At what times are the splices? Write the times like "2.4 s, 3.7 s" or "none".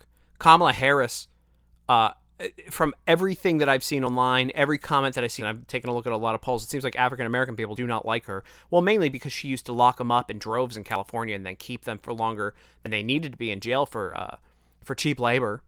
5.4 s

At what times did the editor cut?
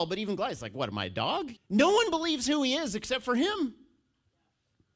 1.6 s

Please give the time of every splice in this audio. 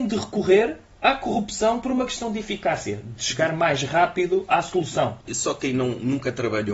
5.3 s

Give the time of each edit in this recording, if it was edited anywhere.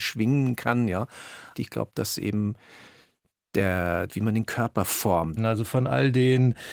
1.5 s, 4.1 s, 5.4 s

